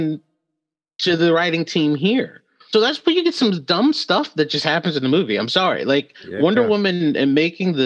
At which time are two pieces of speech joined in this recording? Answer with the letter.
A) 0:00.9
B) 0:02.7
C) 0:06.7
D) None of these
B